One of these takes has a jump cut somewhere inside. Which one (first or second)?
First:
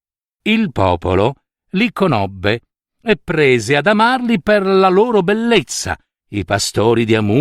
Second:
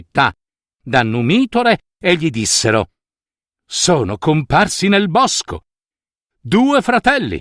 first